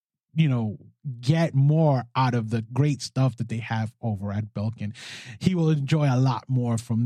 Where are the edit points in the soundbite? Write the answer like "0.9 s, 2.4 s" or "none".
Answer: none